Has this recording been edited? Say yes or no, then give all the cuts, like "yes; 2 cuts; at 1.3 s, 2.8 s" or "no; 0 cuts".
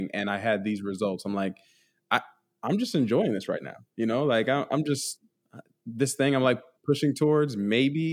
no; 0 cuts